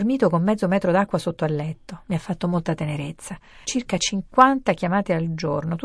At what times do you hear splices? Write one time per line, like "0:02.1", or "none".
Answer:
0:03.6